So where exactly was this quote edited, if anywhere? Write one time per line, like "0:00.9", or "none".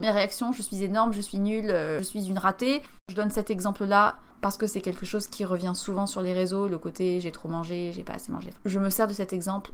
0:03.0
0:08.6